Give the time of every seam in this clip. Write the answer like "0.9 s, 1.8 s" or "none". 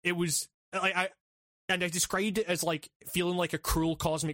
none